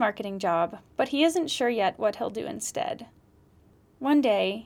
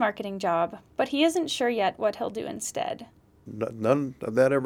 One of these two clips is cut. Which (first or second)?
second